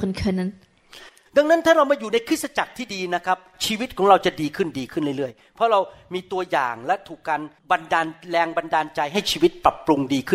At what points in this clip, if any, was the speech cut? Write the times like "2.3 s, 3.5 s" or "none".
1.3 s, 7.6 s

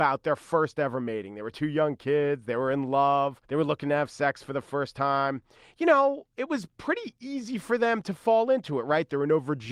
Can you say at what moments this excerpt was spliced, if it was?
3.4 s

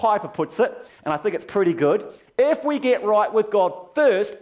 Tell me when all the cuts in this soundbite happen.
none

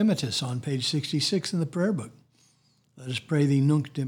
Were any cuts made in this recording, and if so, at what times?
none

